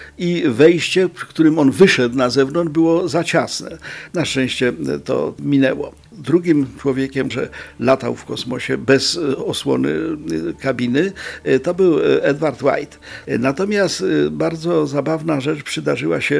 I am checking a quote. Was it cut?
yes; 3 cuts; at 4.1 s, 7.3 s, 13.2 s

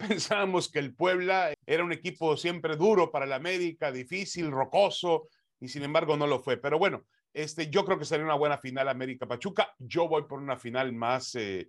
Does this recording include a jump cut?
yes; 1 cut; at 1.5 s

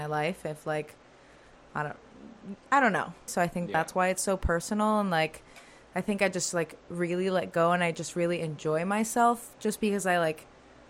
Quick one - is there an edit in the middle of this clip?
yes; 1 cut; at 3.3 s

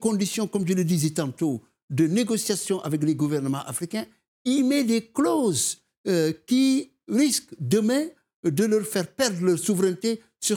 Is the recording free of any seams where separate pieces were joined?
yes; 0 cuts

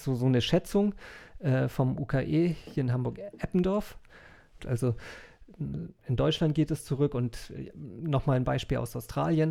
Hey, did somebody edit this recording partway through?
yes; 1 cut; at 4.6 s

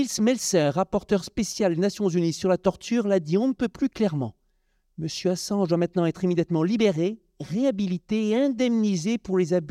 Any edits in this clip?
no; 0 cuts

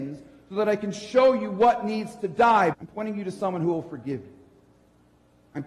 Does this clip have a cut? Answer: yes; 1 cut; at 2.7 s

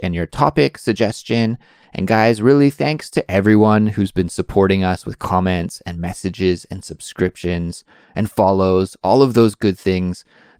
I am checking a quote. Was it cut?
no; 0 cuts

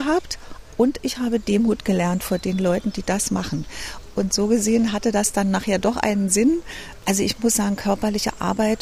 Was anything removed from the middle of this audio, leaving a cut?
no; 0 cuts

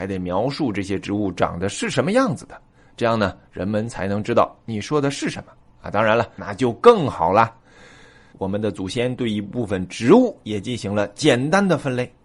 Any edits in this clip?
yes; 2 cuts; at 6.4 s, 8.3 s

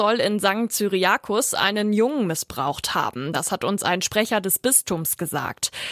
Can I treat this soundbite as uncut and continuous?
yes; 0 cuts

